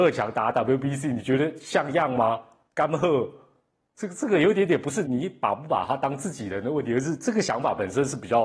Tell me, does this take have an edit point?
yes; 1 cut; at 5.0 s

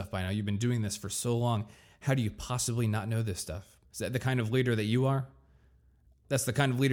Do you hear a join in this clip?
yes; 1 cut; at 3.8 s

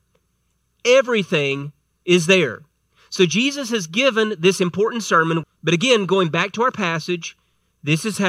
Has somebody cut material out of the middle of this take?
yes; 1 cut; at 5.4 s

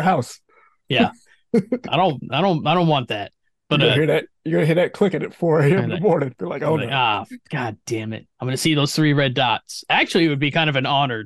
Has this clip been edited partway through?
no; 0 cuts

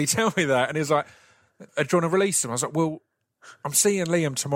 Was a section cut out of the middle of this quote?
yes; 1 cut; at 1.7 s

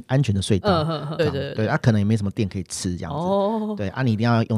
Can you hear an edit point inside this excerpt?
yes; 1 cut; at 1.2 s

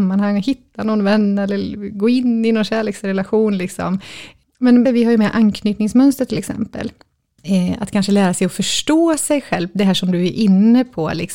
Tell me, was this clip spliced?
yes; 1 cut; at 4.8 s

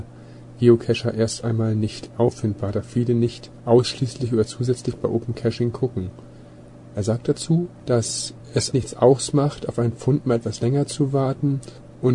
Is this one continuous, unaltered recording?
no; 2 cuts; at 6.9 s, 8.7 s

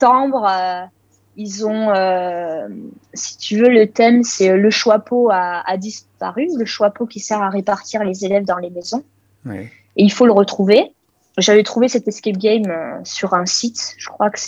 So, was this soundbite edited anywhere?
no; 0 cuts

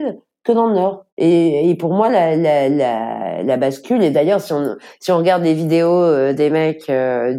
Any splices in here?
yes; 1 cut; at 1.1 s

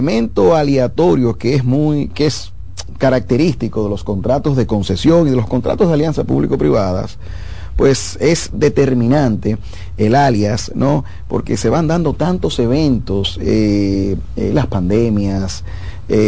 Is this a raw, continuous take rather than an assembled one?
yes; 0 cuts

